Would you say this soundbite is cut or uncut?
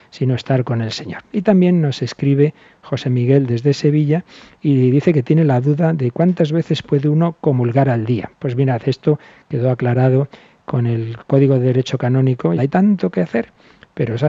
cut